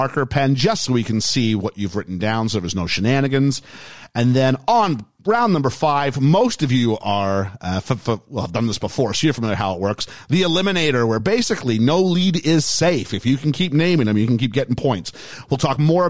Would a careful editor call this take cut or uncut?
uncut